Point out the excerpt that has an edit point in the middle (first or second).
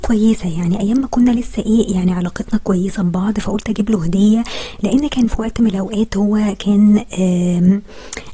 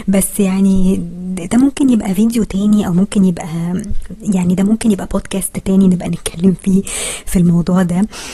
first